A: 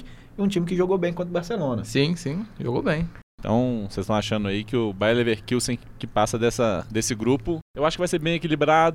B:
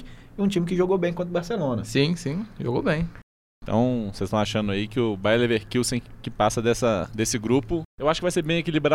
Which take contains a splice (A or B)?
A